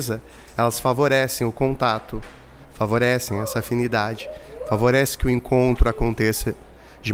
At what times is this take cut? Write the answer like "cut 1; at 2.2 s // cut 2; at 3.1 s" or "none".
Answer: none